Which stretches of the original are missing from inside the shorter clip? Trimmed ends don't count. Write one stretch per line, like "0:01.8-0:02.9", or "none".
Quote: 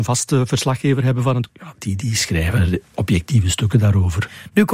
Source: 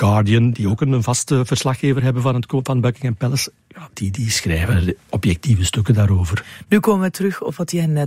0:02.5-0:03.6

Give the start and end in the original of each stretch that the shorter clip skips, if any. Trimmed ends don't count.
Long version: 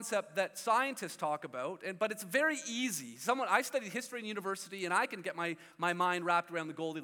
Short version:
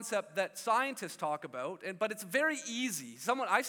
none

